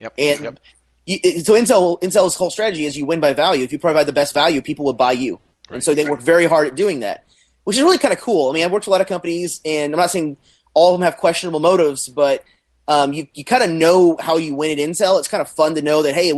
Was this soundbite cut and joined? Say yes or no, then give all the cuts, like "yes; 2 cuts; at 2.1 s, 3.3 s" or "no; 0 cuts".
no; 0 cuts